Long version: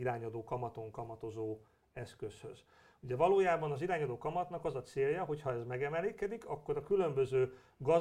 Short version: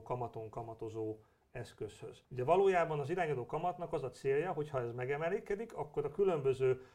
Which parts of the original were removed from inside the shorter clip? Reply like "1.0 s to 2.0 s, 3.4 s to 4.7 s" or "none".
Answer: 2.7 s to 3.0 s